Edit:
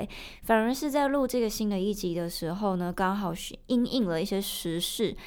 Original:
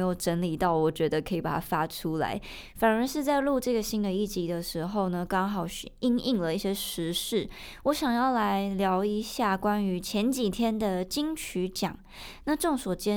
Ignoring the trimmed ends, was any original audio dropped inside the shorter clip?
no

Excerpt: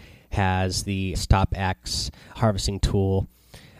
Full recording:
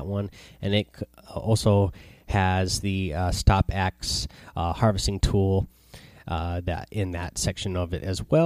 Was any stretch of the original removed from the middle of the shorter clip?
yes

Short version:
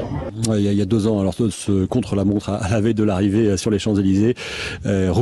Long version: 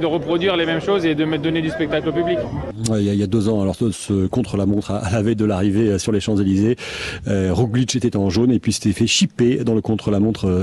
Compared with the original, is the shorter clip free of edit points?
yes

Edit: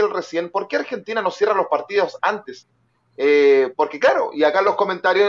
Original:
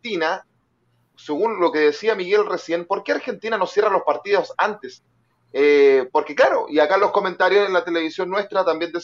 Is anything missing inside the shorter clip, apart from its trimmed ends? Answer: no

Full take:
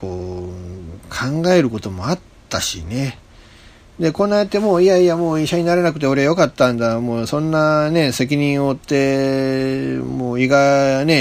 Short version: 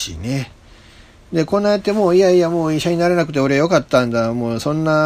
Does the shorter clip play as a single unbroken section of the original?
yes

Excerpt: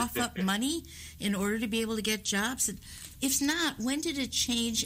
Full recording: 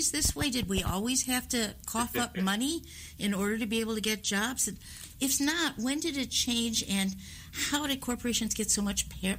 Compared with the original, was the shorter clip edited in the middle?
no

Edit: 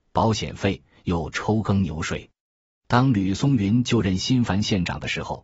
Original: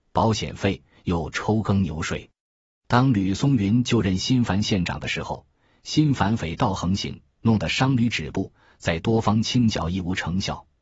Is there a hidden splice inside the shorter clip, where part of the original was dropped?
no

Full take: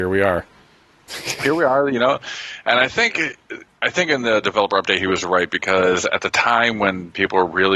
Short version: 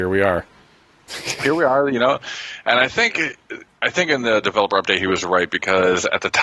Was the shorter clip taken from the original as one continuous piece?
yes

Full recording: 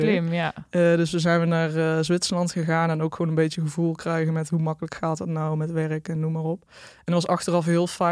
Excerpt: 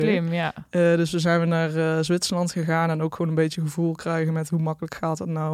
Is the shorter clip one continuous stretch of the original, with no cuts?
yes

